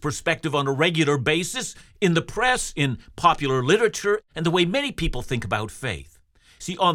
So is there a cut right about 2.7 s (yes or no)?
no